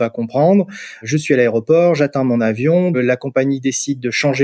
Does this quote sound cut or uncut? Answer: cut